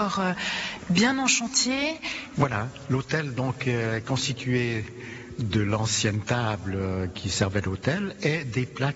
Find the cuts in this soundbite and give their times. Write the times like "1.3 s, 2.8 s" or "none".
2.3 s